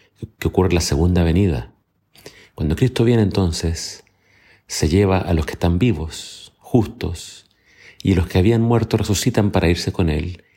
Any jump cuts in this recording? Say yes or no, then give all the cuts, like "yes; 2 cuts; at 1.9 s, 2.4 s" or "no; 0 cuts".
no; 0 cuts